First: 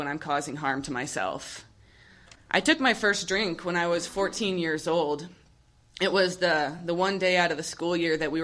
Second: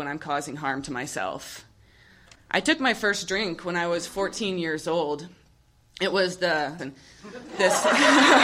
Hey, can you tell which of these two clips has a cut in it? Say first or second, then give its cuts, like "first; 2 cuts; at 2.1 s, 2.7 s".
second; 1 cut; at 6.8 s